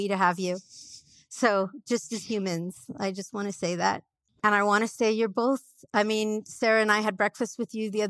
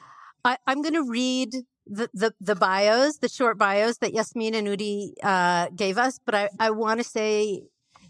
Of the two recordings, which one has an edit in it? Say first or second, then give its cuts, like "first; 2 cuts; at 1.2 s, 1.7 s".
first; 1 cut; at 4.3 s